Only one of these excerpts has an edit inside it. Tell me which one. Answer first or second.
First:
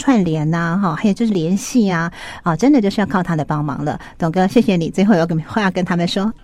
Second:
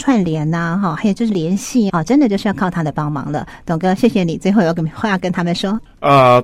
second